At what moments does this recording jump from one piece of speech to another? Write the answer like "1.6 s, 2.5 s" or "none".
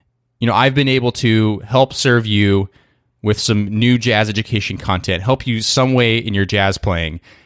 none